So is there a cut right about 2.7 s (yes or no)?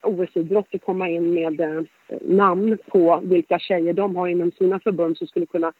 no